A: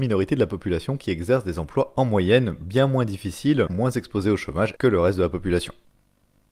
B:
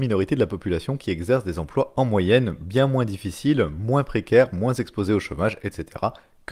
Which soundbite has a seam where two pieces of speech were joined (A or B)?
A